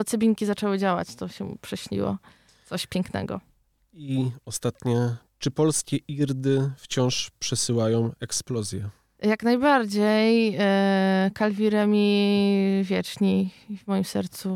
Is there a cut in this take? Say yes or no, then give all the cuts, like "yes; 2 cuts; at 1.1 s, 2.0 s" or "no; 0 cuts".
no; 0 cuts